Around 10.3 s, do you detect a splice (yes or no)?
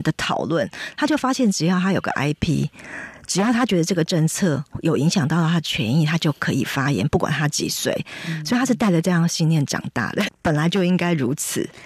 yes